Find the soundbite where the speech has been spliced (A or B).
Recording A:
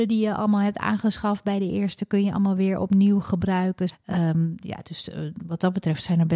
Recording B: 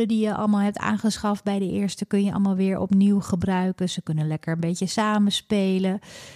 A